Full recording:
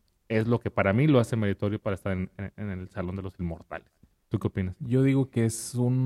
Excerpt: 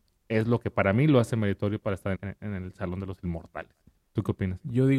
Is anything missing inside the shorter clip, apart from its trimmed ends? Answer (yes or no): yes